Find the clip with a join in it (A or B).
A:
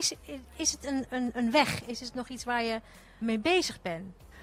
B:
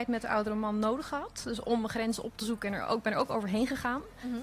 A